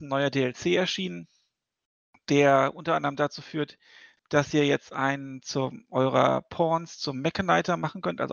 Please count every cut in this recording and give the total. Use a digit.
0